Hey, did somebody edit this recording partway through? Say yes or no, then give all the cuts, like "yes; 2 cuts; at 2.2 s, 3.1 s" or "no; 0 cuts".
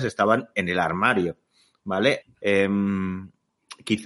yes; 1 cut; at 2.2 s